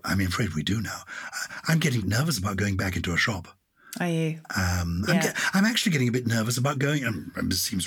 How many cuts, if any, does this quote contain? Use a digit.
1